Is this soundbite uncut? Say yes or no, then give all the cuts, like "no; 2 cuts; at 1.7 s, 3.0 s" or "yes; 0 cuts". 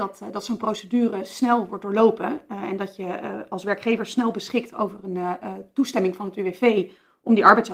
yes; 0 cuts